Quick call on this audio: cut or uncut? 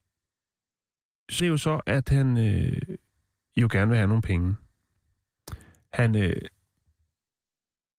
cut